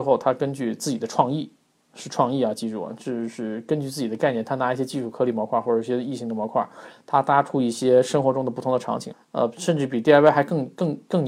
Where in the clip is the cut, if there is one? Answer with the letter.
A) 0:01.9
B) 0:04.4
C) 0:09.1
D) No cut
C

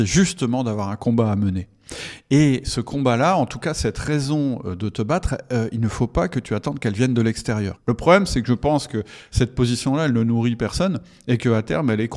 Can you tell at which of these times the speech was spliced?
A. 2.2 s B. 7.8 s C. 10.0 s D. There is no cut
B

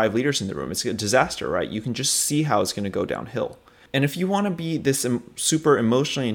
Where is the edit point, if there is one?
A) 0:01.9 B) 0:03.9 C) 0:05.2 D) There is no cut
B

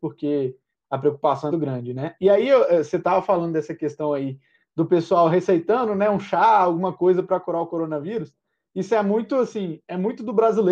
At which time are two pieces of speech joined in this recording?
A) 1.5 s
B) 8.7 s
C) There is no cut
A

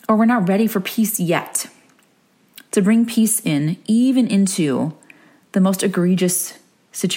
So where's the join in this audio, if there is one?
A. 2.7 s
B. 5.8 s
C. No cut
A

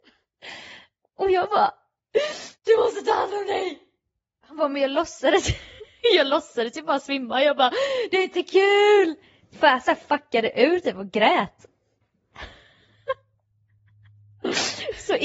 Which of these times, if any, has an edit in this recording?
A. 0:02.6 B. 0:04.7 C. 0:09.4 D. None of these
A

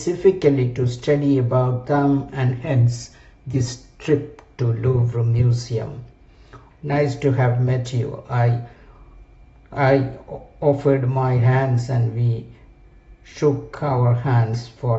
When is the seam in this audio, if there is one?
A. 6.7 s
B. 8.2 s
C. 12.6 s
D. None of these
A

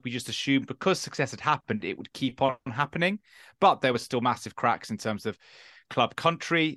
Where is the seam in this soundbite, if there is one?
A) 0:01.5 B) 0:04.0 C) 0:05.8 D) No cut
D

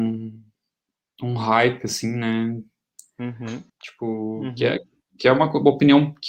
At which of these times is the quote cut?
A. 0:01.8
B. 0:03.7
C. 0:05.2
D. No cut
B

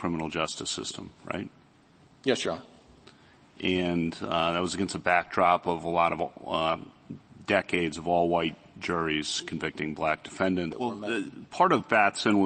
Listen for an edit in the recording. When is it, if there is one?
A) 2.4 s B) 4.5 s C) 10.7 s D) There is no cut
C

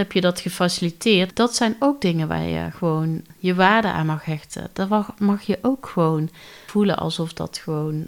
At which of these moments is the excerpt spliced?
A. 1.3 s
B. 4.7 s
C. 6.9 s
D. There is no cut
A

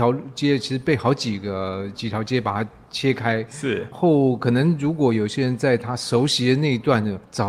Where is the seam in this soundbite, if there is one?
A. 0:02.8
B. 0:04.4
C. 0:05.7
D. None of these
D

